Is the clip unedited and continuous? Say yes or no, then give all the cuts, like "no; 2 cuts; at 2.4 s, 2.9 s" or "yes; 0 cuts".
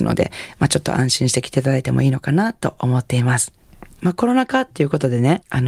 no; 1 cut; at 4.0 s